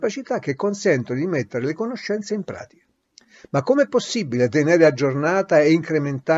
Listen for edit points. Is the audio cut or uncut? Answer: uncut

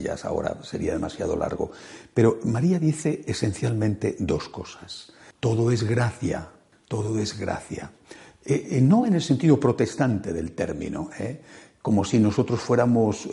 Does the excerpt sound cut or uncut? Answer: cut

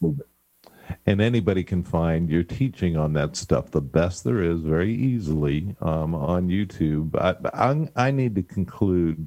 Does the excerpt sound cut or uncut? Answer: uncut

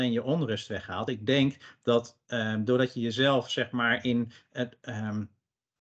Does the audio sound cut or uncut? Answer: uncut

